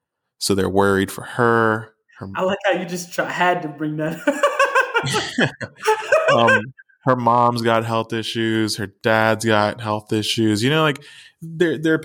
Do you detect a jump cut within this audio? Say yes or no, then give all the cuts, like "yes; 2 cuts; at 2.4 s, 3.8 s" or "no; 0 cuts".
no; 0 cuts